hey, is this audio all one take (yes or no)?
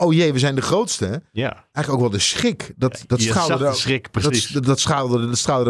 yes